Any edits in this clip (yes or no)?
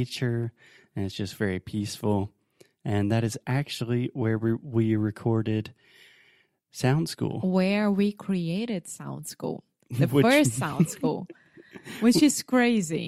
no